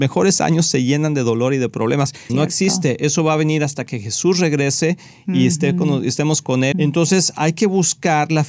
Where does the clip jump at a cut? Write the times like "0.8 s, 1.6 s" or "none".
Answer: 2.3 s, 6.7 s